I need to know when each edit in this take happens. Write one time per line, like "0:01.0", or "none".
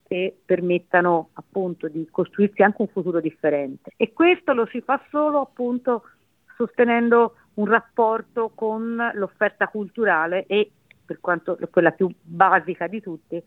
0:03.9